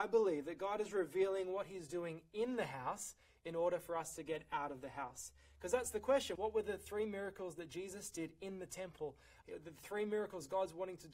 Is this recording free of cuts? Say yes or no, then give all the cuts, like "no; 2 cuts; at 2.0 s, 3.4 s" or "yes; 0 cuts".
no; 2 cuts; at 6.4 s, 9.4 s